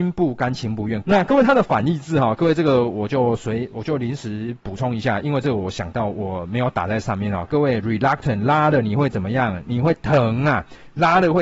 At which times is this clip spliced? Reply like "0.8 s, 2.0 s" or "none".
1.0 s, 7.5 s

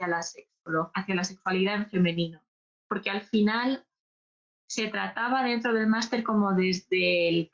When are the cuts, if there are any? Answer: none

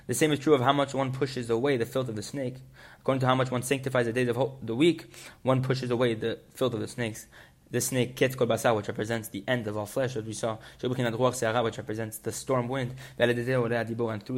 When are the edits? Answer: none

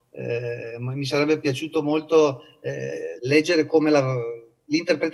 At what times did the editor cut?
none

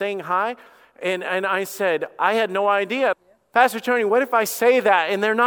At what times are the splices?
3.1 s

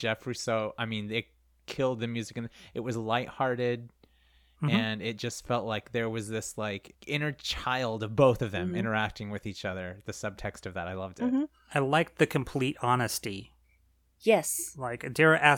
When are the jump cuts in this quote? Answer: none

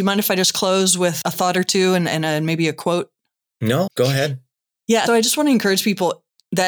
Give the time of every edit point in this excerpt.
3.9 s, 5.1 s

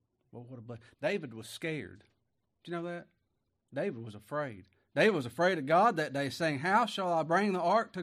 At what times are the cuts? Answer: 0.9 s

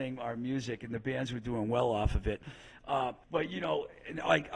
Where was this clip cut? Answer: 3.2 s

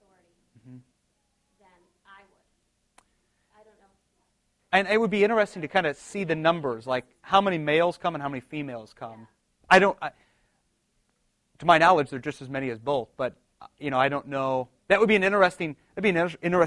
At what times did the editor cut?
none

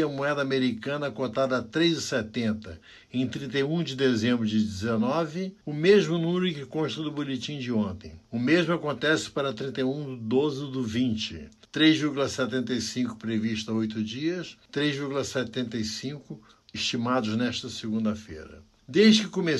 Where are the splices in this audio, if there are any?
none

